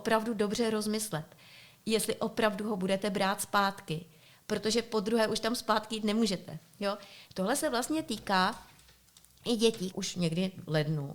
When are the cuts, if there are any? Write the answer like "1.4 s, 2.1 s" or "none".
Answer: 7.3 s, 9.9 s